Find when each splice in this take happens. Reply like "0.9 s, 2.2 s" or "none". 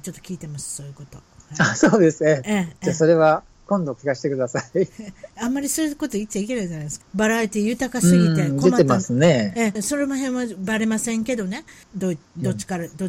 7.0 s, 9.8 s, 11.8 s